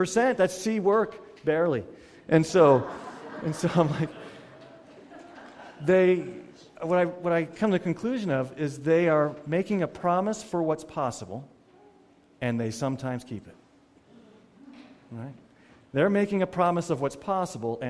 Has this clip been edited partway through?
no; 0 cuts

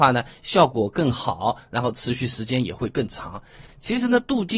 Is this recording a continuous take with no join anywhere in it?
no; 1 cut; at 3.7 s

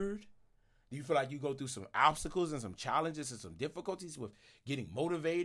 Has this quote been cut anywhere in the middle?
no; 0 cuts

